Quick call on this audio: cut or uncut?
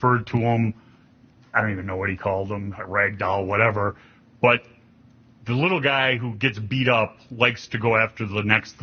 uncut